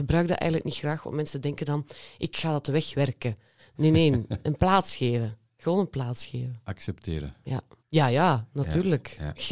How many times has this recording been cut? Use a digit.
1